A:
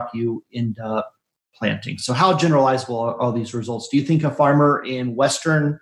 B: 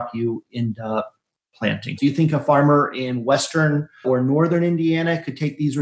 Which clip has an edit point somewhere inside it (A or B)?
B